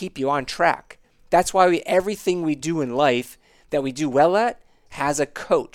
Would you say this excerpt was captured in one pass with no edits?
yes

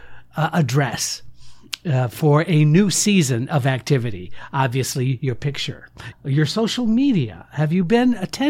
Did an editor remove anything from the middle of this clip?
yes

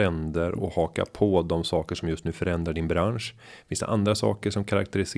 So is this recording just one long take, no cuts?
yes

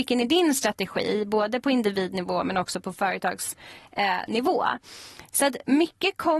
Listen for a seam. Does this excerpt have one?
no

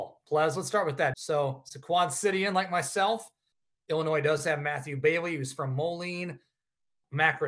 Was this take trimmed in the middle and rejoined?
yes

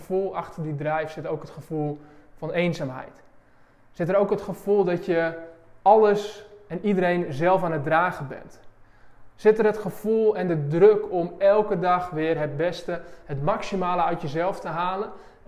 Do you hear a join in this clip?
no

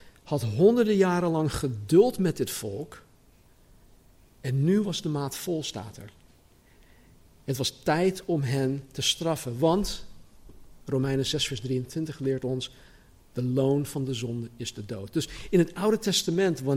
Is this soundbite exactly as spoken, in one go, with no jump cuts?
yes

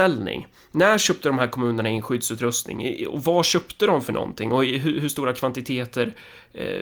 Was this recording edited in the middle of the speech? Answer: no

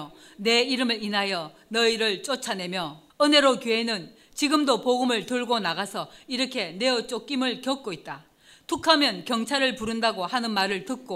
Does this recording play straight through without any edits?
no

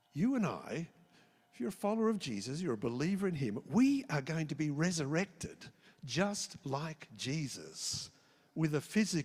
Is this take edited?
no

